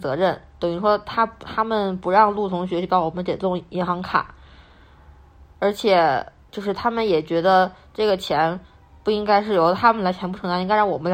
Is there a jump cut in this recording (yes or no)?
no